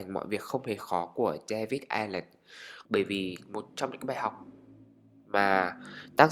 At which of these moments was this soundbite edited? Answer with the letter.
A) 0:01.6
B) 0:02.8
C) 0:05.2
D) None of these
B